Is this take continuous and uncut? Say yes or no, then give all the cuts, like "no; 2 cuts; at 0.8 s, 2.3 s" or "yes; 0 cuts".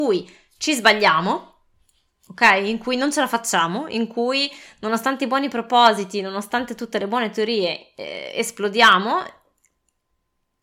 yes; 0 cuts